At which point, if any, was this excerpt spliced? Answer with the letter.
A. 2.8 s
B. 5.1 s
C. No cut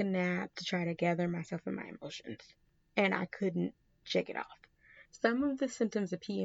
B